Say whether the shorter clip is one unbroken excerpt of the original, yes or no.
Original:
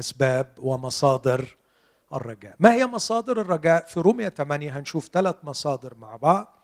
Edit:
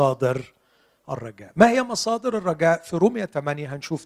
yes